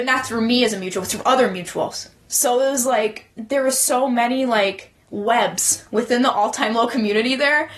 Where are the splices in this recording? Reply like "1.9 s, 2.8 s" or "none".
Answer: 3.3 s, 5.0 s